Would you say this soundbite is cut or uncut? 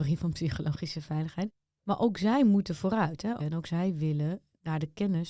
cut